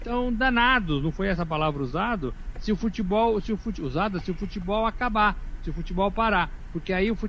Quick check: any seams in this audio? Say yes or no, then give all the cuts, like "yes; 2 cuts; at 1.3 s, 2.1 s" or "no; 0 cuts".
no; 0 cuts